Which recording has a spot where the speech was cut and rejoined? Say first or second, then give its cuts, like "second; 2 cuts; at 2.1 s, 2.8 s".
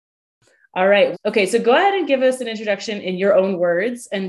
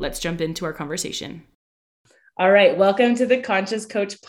first; 1 cut; at 1.1 s